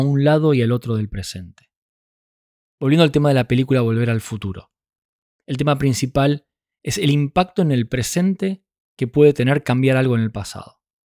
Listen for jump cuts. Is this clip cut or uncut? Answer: cut